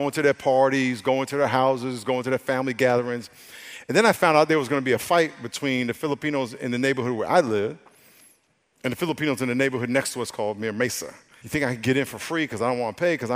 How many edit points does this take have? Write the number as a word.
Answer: one